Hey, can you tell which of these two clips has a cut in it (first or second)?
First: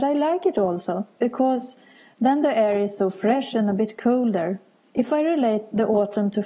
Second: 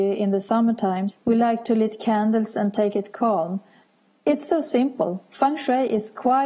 second